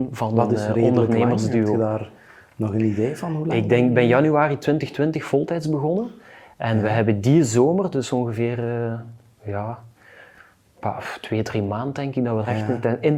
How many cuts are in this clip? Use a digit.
0